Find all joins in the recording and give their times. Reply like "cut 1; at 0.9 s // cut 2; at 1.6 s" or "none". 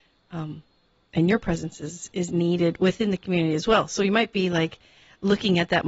none